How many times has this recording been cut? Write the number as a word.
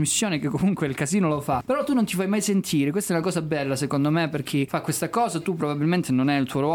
zero